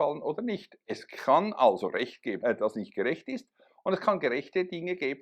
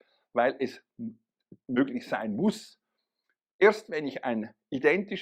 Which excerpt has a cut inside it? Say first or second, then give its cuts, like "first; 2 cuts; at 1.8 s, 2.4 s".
first; 1 cut; at 2.4 s